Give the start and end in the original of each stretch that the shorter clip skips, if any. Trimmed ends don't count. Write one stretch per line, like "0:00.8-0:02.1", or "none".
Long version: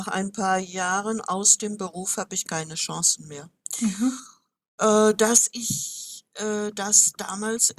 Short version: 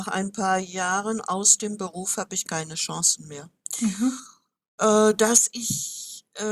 none